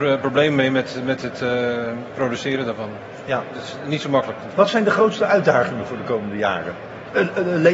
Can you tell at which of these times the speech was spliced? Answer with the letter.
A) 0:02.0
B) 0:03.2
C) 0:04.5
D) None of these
C